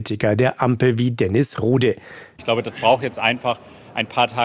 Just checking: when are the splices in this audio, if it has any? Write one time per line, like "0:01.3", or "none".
0:02.4